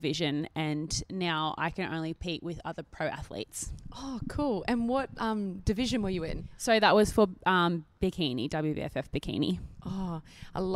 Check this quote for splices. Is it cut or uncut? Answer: uncut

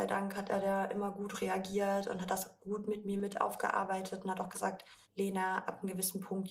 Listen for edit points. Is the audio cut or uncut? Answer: cut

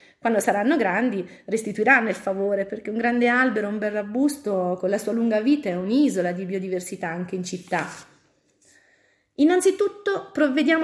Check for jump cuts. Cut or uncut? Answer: uncut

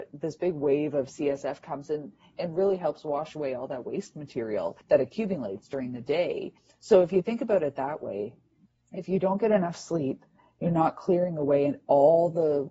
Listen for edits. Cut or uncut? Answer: uncut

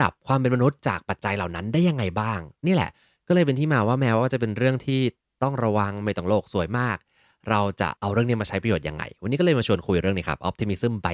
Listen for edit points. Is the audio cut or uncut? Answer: cut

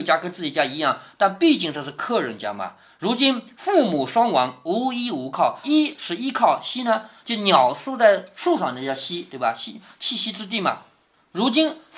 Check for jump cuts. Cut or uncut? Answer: cut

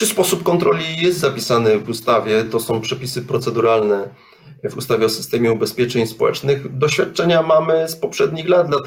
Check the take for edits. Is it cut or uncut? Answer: uncut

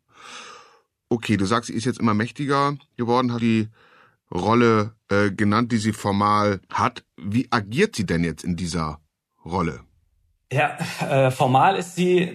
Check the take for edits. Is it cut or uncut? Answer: cut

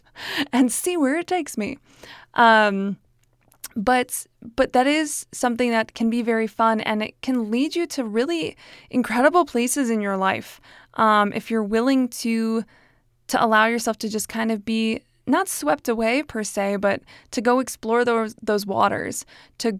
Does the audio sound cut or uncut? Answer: uncut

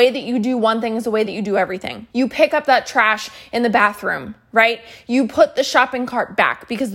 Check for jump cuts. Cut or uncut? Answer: cut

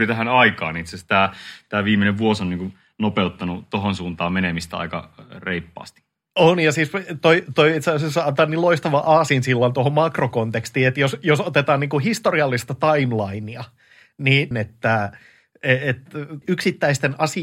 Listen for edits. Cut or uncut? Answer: cut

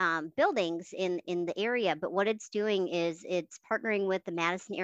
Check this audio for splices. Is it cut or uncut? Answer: uncut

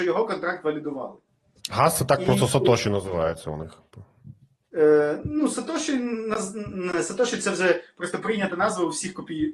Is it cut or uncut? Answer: uncut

